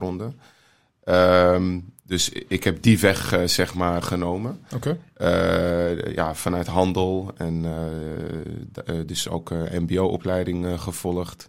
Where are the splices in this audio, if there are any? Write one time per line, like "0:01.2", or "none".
0:04.0

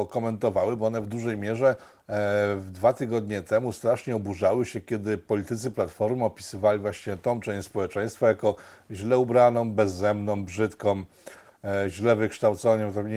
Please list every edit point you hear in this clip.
none

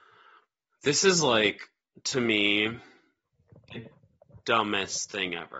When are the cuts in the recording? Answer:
none

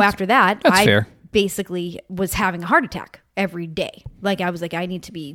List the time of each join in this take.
none

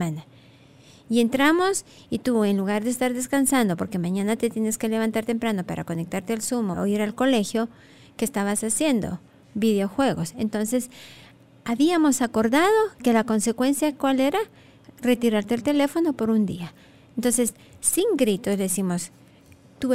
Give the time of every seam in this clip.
0:06.7

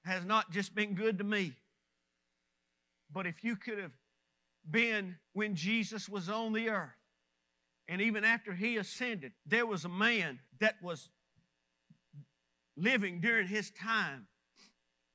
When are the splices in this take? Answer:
0:05.2
0:09.4
0:10.5

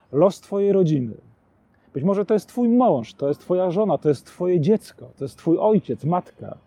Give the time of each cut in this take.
none

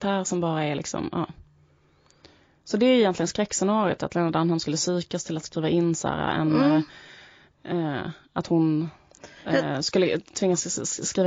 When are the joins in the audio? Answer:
none

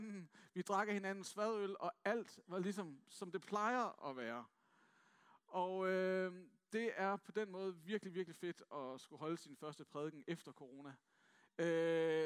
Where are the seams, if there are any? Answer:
none

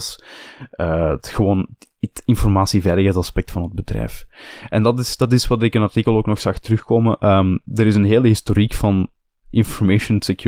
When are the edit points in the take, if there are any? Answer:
none

